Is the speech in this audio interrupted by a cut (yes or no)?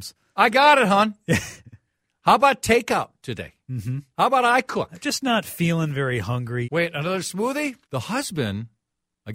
yes